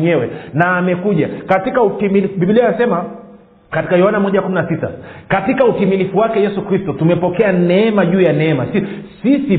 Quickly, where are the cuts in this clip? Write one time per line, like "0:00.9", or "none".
none